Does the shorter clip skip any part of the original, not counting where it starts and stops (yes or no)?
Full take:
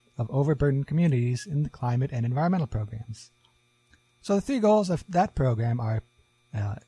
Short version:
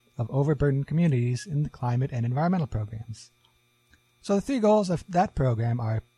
no